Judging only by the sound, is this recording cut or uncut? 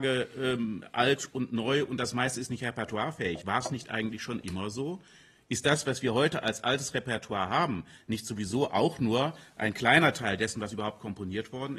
uncut